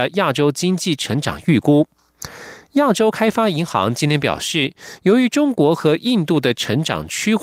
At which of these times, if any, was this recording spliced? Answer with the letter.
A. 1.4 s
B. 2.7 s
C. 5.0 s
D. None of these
B